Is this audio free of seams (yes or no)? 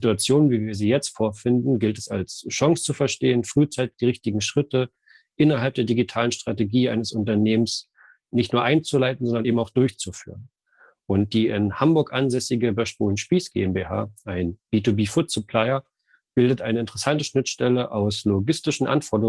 yes